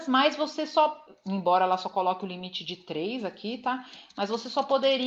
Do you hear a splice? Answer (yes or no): no